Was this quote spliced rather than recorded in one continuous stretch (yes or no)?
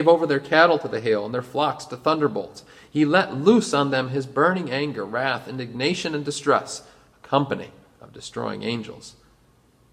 no